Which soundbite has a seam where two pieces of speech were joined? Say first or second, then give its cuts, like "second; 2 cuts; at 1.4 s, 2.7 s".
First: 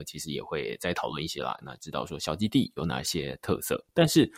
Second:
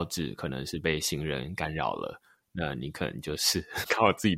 first; 1 cut; at 1.6 s